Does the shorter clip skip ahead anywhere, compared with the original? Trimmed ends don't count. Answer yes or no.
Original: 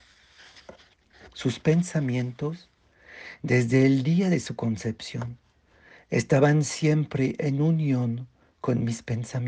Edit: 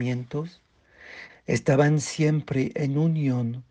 yes